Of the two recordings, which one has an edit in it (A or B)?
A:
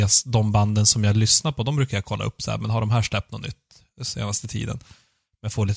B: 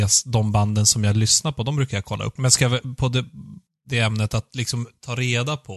B